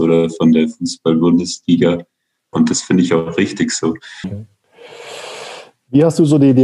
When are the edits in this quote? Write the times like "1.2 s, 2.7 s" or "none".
2.5 s, 4.2 s